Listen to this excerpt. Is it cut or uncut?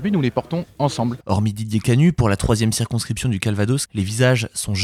cut